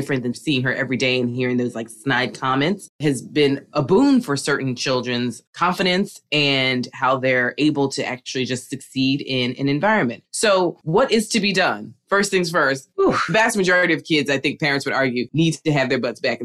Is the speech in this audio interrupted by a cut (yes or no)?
no